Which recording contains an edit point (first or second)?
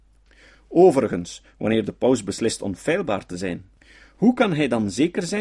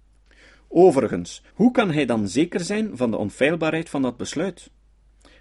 second